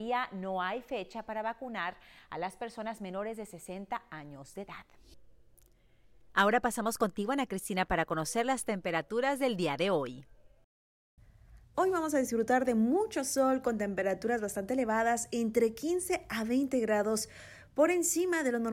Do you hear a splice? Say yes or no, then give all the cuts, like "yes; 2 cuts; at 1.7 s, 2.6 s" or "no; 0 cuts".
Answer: yes; 1 cut; at 11.7 s